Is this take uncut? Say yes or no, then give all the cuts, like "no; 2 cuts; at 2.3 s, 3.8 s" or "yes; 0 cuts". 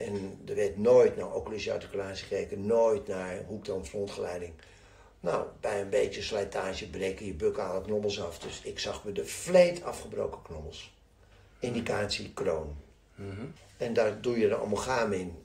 no; 1 cut; at 13.6 s